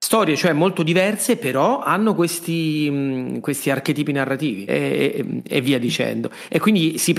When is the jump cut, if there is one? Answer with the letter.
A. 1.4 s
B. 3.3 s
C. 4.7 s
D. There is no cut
C